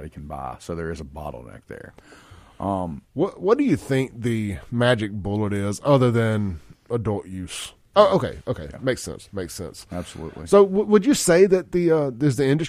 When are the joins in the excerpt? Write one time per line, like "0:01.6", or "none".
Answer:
0:07.9